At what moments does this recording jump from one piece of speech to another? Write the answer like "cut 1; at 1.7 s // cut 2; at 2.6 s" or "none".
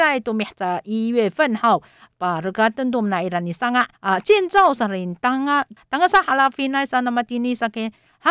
cut 1; at 4.0 s // cut 2; at 5.8 s